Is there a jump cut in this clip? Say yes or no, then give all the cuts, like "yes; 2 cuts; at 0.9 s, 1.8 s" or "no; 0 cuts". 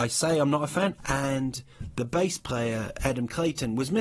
yes; 1 cut; at 1.0 s